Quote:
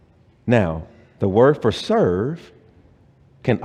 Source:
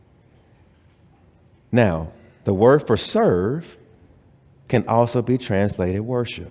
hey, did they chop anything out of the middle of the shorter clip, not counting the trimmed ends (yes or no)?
no